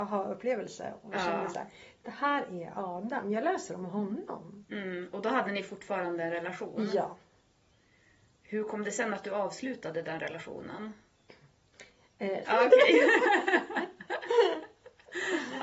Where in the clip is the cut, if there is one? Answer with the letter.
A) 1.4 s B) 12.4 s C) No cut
B